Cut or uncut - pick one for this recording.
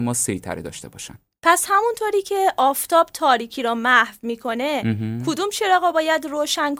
uncut